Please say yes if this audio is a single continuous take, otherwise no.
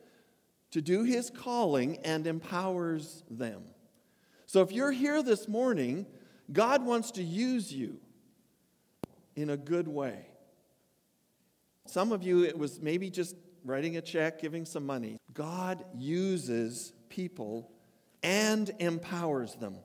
no